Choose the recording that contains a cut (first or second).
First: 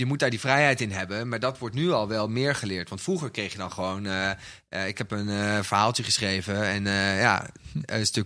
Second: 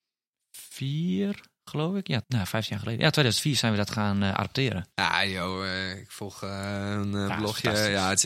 second